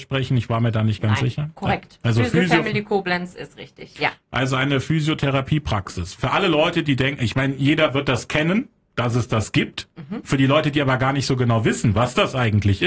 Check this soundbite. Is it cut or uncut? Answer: uncut